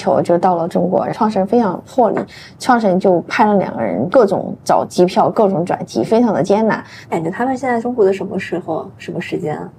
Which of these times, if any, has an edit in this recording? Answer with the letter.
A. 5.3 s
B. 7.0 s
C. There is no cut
B